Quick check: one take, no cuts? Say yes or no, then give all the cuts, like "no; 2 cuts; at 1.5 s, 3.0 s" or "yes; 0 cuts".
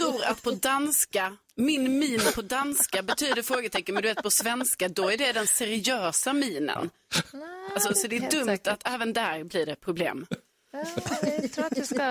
yes; 0 cuts